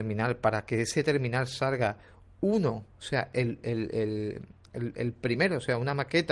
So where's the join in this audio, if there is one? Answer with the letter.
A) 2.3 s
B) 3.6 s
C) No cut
C